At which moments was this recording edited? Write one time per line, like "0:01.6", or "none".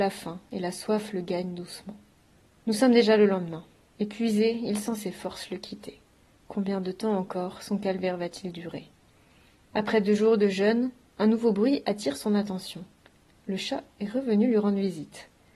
none